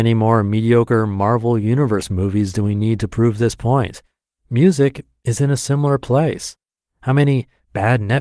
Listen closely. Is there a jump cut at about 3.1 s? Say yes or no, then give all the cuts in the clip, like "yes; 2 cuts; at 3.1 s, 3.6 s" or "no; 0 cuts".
no; 2 cuts; at 4.4 s, 6.8 s